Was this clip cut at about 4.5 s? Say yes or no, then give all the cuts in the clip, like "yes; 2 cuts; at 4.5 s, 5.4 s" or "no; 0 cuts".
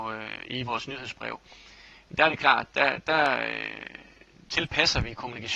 yes; 1 cut; at 4.5 s